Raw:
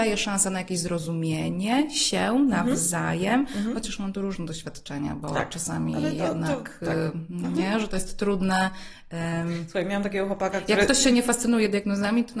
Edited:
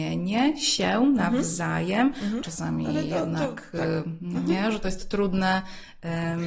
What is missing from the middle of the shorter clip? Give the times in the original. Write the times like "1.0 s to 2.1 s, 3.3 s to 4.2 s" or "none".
3.7 s to 5.5 s